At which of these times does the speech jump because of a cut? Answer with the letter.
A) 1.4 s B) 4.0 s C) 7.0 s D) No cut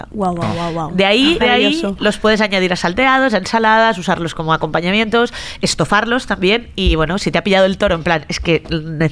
A